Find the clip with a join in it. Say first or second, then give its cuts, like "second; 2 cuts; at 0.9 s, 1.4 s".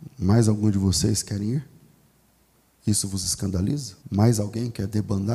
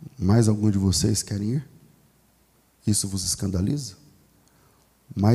first; 1 cut; at 4.0 s